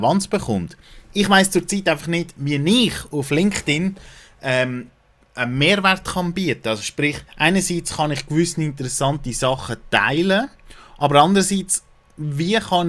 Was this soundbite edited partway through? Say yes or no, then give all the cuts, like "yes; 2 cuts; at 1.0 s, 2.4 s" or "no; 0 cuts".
yes; 1 cut; at 7.3 s